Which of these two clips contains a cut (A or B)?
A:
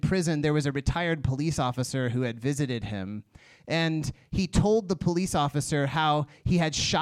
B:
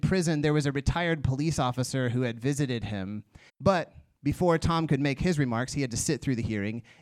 B